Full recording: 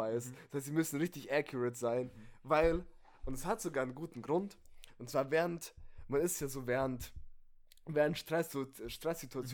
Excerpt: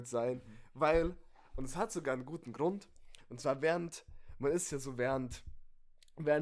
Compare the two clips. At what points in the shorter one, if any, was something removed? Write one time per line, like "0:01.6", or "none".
none